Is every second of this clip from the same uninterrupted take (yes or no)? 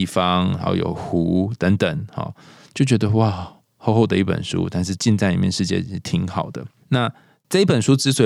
yes